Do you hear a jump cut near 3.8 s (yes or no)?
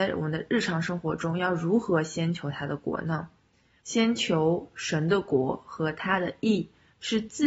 yes